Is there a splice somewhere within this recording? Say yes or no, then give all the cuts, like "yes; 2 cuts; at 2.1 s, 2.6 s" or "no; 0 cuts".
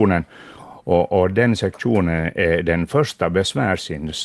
no; 0 cuts